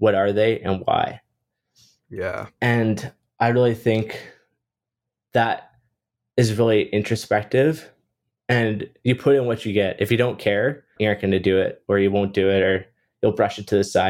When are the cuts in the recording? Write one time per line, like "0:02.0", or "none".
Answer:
0:11.0